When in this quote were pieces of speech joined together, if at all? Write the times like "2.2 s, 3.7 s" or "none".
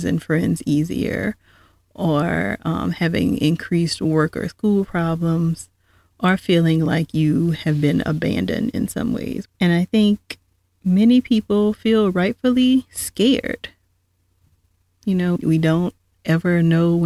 9.5 s, 15.4 s